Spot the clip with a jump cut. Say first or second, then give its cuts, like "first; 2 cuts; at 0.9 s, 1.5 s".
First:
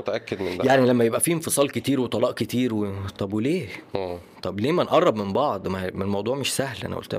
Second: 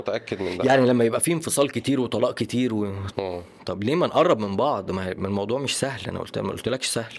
second; 1 cut; at 3.1 s